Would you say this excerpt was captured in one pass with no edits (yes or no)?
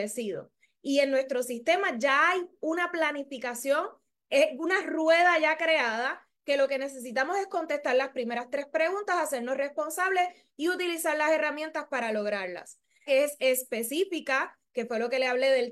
no